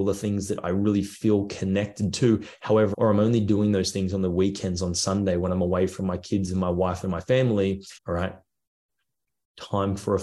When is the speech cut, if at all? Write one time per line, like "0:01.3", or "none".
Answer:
0:02.9
0:08.0